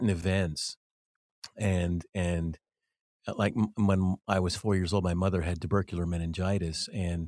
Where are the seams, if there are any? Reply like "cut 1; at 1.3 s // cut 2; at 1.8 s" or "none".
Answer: none